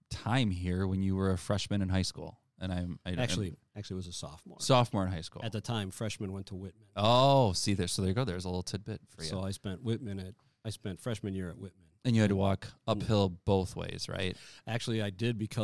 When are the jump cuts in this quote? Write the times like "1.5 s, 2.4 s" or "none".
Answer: none